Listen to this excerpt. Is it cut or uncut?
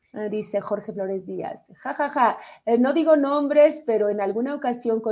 uncut